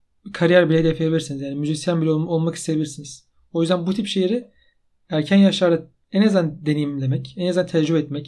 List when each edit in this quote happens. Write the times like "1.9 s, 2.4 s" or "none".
none